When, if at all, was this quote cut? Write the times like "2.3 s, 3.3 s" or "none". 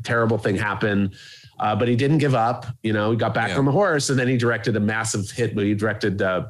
none